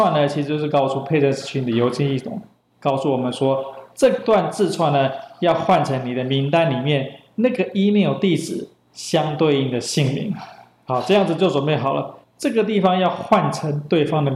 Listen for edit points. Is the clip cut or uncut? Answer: cut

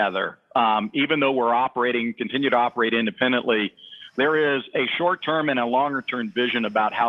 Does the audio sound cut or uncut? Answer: uncut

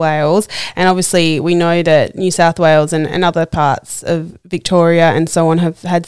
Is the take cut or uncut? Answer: uncut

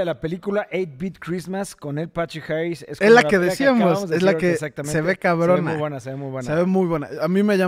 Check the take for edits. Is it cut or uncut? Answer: uncut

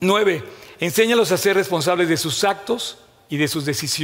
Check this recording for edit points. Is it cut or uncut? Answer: uncut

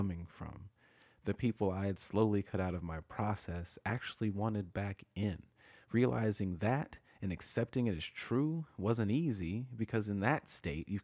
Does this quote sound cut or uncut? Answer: uncut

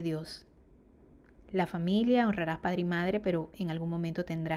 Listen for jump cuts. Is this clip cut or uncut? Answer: uncut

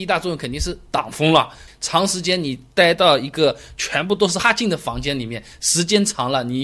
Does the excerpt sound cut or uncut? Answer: cut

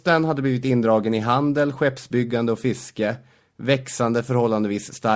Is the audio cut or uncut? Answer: uncut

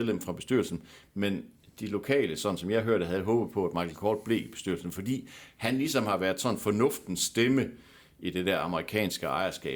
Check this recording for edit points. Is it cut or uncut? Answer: uncut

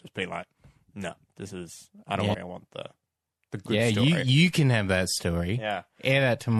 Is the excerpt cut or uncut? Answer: cut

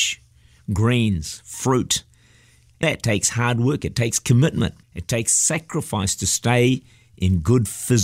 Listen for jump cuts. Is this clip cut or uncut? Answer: cut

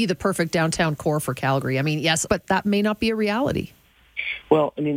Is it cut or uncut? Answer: cut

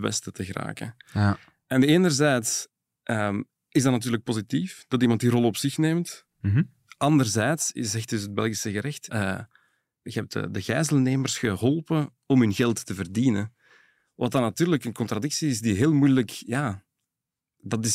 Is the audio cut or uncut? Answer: cut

